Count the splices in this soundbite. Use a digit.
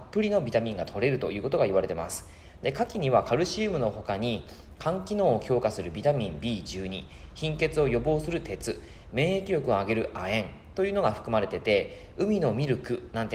0